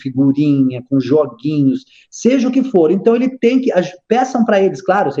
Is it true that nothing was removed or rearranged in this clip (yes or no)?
yes